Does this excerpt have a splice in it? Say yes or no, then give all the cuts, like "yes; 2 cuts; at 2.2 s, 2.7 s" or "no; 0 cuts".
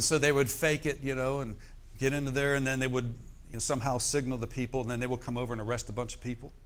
no; 0 cuts